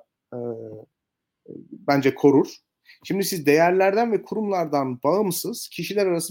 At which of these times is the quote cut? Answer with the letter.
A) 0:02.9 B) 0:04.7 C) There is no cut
C